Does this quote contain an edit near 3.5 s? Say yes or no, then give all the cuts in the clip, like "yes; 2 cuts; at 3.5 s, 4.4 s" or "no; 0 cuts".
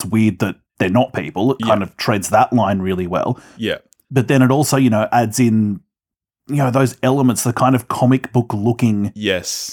no; 0 cuts